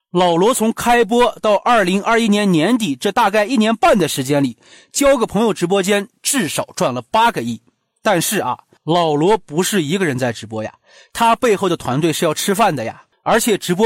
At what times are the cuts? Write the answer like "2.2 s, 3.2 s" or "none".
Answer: none